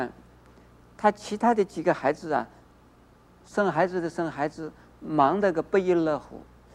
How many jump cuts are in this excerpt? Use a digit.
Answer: 2